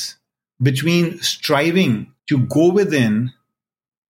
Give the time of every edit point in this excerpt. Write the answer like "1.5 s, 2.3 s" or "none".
2.2 s